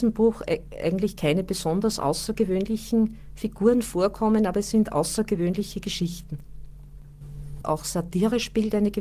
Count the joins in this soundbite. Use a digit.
1